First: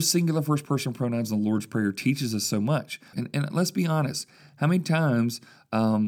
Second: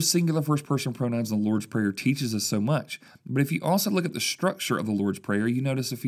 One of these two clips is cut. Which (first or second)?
first